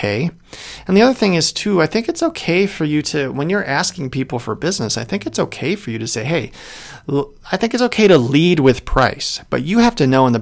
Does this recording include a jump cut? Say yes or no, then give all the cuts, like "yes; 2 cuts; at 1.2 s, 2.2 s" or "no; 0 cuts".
no; 0 cuts